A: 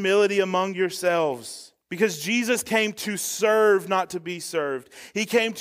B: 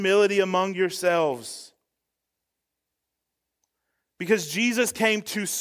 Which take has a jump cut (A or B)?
A